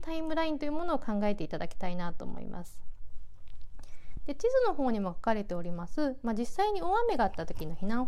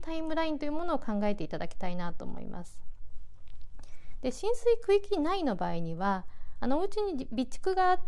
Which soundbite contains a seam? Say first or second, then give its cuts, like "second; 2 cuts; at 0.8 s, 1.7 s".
second; 1 cut; at 4.2 s